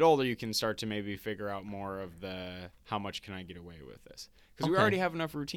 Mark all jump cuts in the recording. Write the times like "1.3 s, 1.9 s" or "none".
none